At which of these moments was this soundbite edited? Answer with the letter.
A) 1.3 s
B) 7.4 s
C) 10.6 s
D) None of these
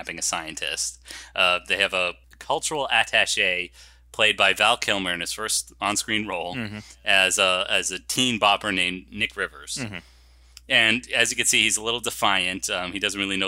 D